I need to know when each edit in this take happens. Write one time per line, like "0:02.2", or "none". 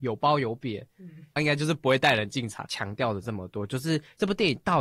0:01.4
0:02.7